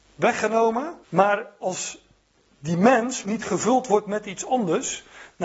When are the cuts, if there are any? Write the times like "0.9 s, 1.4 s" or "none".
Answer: 1.0 s, 3.2 s